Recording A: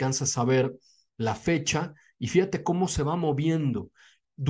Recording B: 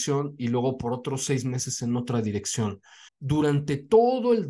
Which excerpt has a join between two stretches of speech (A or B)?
B